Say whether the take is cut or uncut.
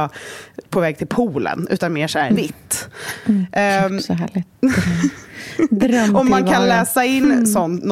cut